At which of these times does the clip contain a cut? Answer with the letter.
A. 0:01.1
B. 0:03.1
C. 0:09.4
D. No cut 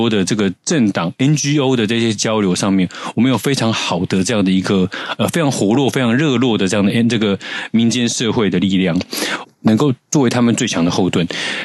C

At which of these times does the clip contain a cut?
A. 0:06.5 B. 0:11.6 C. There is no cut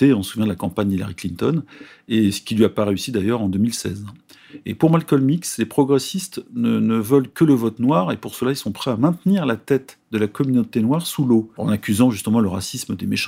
B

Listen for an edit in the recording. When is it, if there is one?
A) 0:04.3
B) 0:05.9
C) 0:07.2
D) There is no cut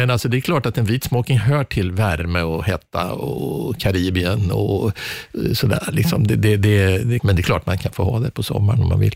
C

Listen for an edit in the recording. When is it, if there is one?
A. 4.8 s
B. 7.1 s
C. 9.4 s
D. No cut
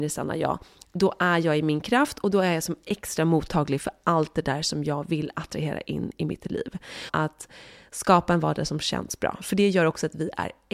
B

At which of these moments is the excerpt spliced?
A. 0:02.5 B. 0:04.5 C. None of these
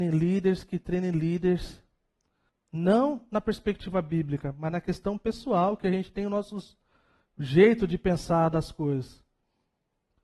A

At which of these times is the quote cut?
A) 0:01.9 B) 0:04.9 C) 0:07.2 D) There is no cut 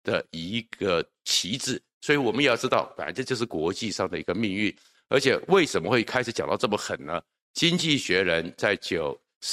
D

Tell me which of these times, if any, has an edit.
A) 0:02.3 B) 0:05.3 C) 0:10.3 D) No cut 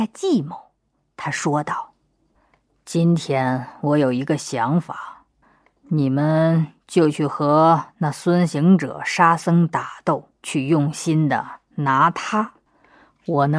C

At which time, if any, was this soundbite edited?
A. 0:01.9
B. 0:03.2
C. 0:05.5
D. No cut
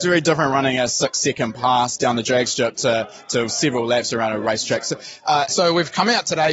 C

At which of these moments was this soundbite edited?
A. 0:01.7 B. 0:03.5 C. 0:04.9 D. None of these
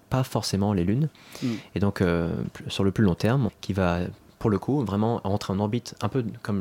B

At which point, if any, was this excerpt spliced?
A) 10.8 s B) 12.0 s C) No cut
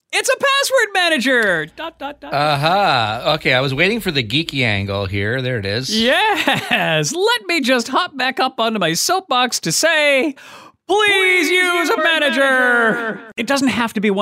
B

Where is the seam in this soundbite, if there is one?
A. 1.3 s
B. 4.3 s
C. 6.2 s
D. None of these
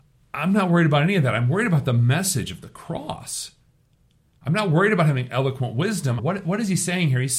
C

